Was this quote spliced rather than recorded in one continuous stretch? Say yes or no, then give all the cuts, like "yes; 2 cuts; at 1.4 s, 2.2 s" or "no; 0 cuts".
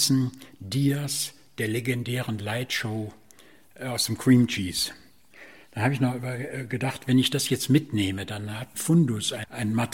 yes; 1 cut; at 8.7 s